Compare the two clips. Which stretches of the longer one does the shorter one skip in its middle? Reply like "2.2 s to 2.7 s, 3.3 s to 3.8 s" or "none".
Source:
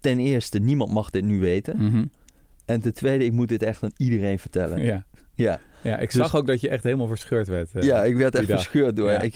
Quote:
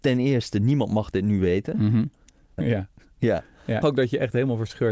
2.6 s to 4.7 s, 6.0 s to 6.3 s